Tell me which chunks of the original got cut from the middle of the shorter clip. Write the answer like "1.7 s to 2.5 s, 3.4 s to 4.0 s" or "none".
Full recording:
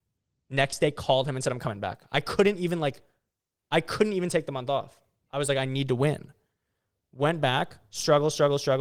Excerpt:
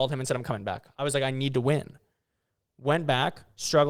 2.1 s to 5.3 s